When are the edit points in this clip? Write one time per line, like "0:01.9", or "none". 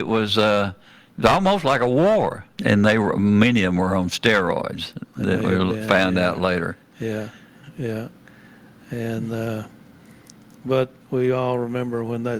0:02.6